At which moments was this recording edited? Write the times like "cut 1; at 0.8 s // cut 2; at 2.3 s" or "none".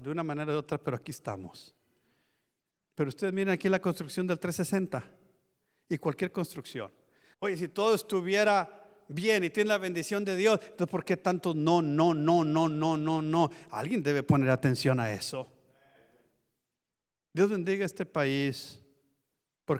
cut 1; at 2.9 s // cut 2; at 7.3 s